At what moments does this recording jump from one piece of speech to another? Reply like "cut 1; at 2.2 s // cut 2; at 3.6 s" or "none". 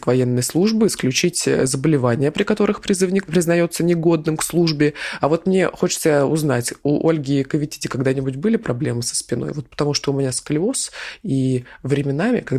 cut 1; at 5.2 s